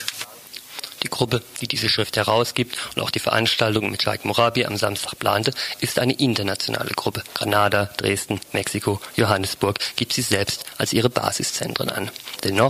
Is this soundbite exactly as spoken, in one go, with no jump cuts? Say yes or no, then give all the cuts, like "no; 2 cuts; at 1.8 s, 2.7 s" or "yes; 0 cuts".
yes; 0 cuts